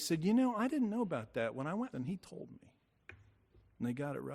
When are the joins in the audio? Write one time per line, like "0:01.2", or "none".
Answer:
0:01.9